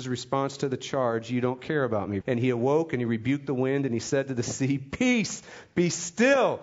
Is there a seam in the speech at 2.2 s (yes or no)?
yes